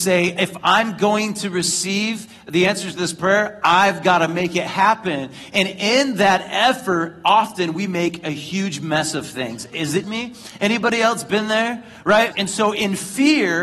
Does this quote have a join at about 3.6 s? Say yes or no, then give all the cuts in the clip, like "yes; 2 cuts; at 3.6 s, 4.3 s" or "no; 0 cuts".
no; 2 cuts; at 10.0 s, 12.3 s